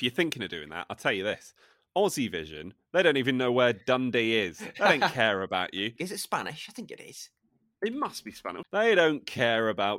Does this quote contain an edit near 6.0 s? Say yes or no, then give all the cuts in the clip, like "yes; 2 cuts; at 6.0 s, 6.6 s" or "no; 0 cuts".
yes; 2 cuts; at 6.0 s, 8.6 s